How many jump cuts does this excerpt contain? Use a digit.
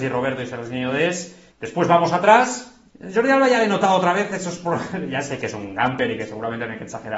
2